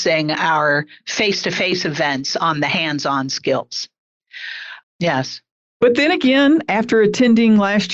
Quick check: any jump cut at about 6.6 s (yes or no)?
no